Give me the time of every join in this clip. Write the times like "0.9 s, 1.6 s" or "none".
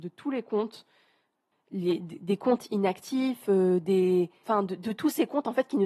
4.4 s